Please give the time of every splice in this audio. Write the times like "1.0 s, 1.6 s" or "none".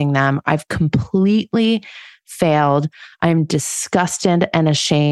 none